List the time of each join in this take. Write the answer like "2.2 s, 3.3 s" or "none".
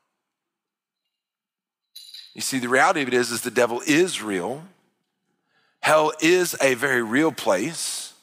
none